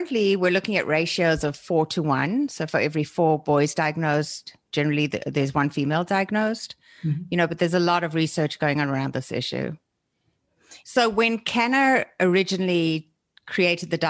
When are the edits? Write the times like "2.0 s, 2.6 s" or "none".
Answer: 10.8 s